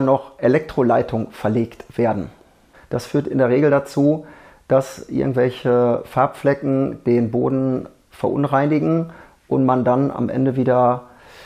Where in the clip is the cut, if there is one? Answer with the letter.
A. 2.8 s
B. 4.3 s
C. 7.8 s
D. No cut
A